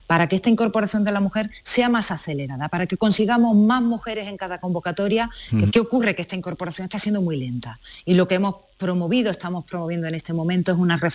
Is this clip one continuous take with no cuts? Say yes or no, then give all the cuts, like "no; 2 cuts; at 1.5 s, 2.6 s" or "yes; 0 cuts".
no; 1 cut; at 5.7 s